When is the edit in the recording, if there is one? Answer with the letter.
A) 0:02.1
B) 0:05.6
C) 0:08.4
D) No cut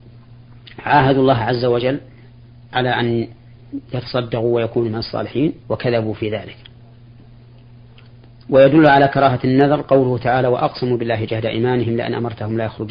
B